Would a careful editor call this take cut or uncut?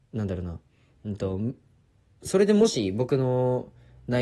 uncut